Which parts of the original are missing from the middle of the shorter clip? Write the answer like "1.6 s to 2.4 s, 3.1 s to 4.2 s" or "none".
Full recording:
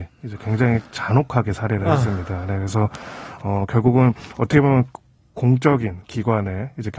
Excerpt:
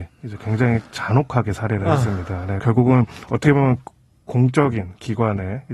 2.6 s to 3.7 s